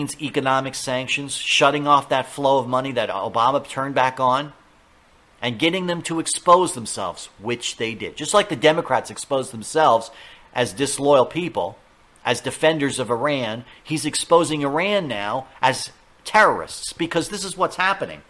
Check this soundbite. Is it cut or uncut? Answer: uncut